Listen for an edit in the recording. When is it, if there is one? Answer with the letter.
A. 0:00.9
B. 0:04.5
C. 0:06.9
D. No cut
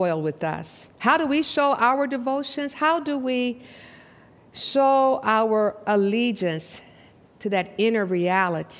A